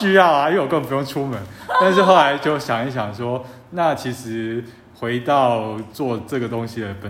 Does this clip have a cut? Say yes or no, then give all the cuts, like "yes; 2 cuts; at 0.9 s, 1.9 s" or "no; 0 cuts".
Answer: no; 0 cuts